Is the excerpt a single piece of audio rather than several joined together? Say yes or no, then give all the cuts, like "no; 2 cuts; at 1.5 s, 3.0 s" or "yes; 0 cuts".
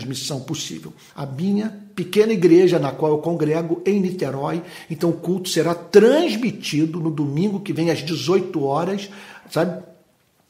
no; 1 cut; at 1.1 s